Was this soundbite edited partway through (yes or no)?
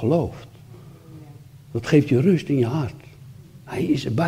no